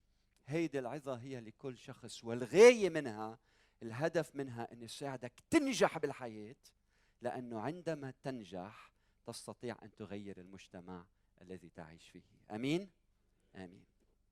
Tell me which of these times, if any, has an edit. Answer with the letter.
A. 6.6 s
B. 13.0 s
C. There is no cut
C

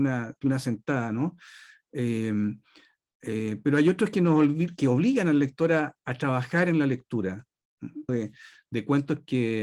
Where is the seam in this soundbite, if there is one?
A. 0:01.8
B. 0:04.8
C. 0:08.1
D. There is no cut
C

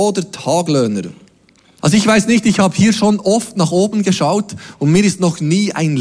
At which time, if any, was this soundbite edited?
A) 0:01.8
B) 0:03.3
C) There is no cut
A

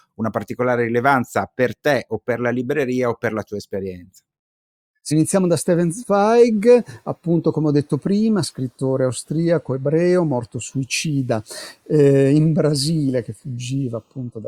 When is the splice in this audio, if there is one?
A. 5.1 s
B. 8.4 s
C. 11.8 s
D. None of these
A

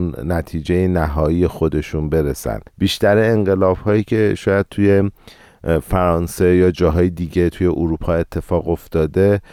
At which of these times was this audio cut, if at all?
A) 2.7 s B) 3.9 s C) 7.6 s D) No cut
A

